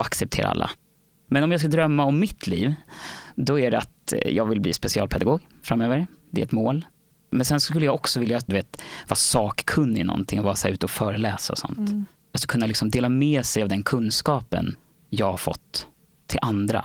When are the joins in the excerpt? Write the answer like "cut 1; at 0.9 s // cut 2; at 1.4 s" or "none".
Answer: cut 1; at 8.5 s